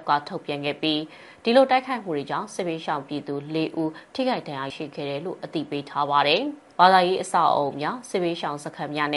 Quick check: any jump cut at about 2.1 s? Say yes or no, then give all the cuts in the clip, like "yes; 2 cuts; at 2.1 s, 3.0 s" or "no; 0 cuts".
no; 2 cuts; at 4.7 s, 6.7 s